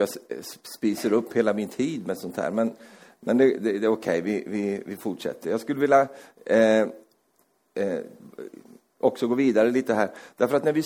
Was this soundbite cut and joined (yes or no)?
no